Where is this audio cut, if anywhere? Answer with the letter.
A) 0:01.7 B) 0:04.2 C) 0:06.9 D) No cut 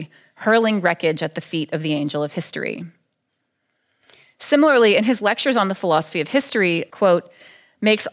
C